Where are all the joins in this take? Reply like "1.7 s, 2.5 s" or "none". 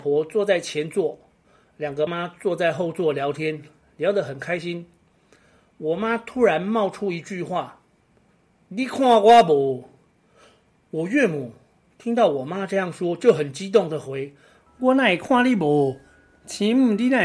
2.1 s